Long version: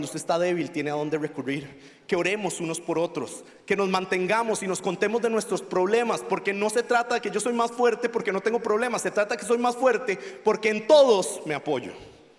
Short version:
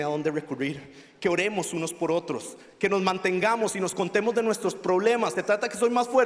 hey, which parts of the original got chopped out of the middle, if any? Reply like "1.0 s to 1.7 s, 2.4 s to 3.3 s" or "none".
6.2 s to 9.0 s